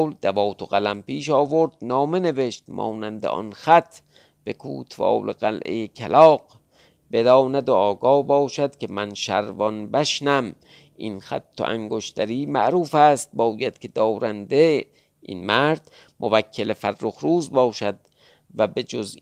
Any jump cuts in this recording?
no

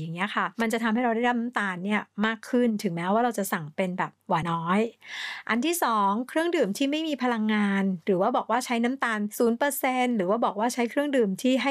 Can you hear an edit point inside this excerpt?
yes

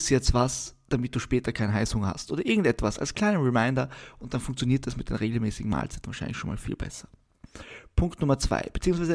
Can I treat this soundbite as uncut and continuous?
yes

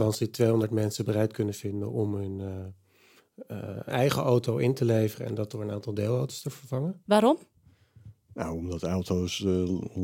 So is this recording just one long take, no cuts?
no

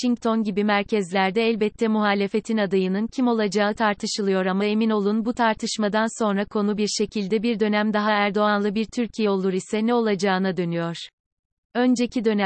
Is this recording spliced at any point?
no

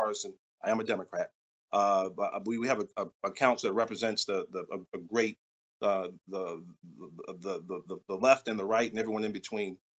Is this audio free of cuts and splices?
yes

